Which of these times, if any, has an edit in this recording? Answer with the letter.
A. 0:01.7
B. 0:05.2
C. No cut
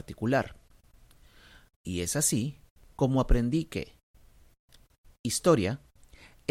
A